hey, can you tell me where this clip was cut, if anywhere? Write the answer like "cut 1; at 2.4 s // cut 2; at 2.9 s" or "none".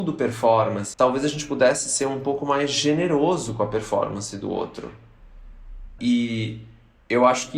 cut 1; at 0.9 s // cut 2; at 6.0 s